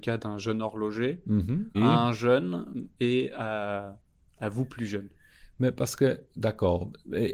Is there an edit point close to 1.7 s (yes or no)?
yes